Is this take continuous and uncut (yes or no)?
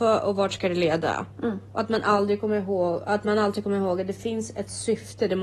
no